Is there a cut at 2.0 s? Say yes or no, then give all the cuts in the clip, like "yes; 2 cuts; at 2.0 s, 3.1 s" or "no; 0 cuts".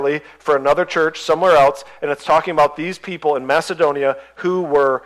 no; 0 cuts